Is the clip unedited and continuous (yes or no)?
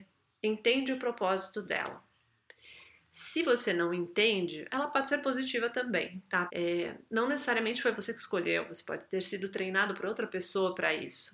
no